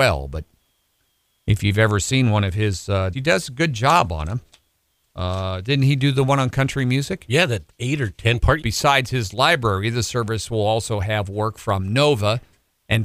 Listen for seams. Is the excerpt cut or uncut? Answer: cut